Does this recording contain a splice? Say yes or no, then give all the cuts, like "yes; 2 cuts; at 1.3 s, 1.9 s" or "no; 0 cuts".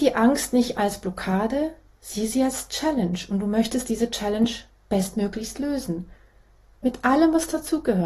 no; 0 cuts